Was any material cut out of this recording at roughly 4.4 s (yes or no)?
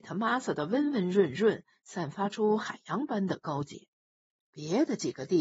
yes